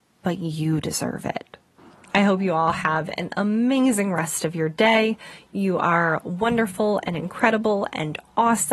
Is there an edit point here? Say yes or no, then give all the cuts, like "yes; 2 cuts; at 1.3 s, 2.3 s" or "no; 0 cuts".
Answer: no; 0 cuts